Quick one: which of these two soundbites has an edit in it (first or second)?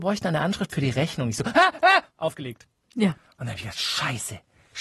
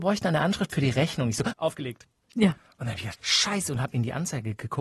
second